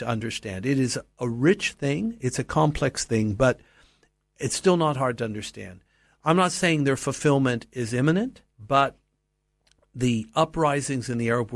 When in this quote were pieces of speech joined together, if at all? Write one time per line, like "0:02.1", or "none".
0:06.2
0:08.5